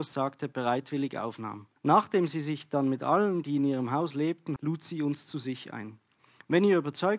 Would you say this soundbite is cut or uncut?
cut